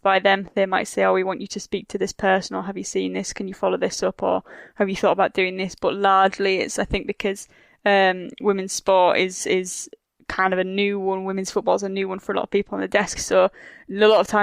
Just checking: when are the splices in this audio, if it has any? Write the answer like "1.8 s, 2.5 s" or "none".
13.2 s